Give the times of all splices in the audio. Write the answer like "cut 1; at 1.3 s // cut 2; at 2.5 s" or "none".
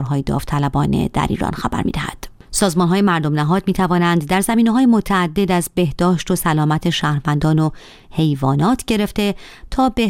none